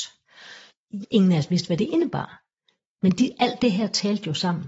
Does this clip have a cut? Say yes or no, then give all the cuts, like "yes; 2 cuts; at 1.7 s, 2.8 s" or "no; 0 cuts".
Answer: yes; 1 cut; at 1.0 s